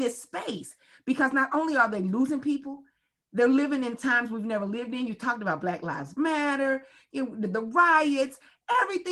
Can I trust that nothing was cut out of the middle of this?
yes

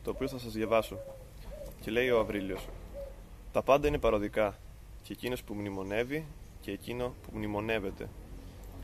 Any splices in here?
no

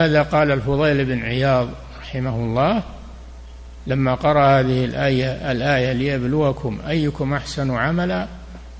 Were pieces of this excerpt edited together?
no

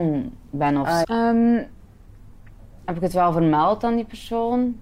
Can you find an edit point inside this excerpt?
yes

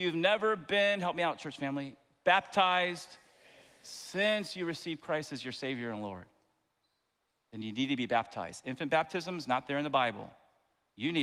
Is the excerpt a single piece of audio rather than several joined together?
yes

